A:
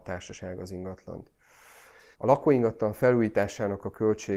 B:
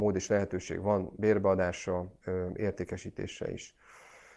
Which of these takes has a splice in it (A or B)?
A